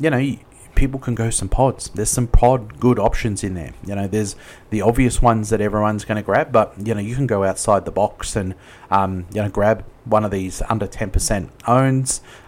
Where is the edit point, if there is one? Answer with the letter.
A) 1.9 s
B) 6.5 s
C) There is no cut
C